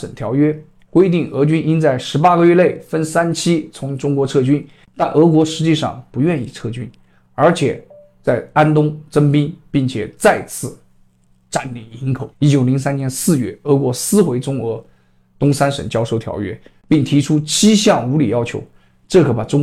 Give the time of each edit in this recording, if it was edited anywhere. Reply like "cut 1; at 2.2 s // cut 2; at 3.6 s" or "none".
cut 1; at 12.3 s